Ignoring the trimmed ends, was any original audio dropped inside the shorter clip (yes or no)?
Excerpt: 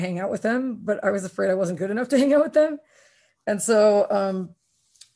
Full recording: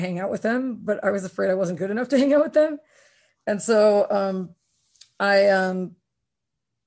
no